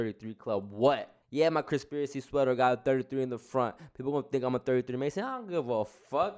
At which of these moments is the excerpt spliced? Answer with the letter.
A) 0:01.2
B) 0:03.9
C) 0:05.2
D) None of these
A